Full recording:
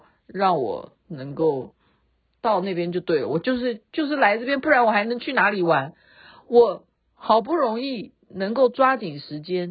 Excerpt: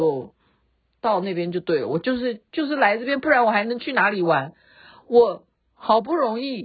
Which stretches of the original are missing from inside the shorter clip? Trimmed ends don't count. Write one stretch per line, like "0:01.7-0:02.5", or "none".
none